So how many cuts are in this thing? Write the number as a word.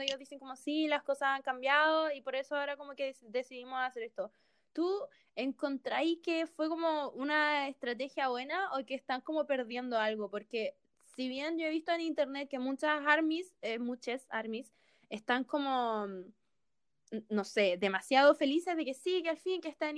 zero